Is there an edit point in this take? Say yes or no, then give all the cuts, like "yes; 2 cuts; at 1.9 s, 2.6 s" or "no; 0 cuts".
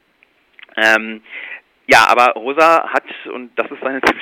no; 0 cuts